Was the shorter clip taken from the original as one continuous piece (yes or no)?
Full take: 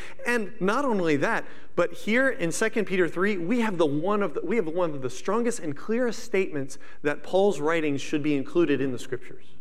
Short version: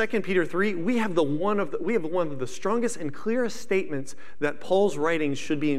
yes